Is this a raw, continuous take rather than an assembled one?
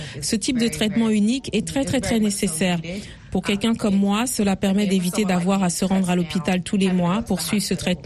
yes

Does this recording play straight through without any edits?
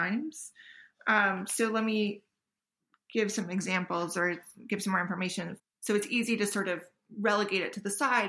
no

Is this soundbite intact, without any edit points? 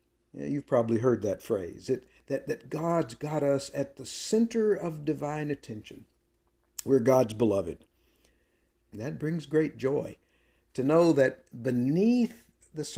no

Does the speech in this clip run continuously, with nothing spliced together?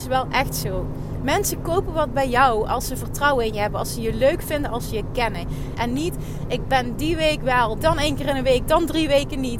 no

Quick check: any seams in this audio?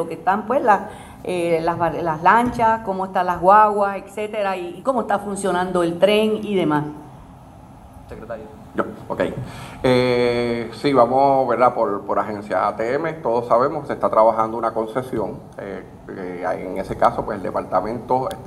yes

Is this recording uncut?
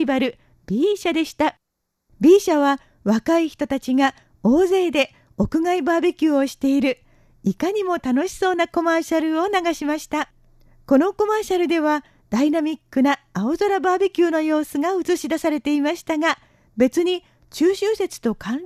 yes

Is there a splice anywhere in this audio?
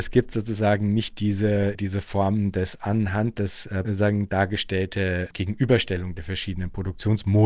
yes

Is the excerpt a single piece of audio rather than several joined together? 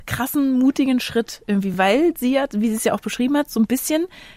yes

